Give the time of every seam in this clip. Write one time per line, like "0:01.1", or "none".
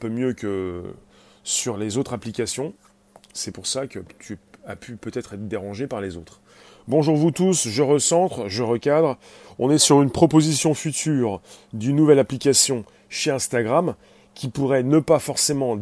none